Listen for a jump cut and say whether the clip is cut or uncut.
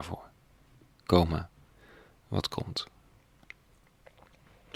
uncut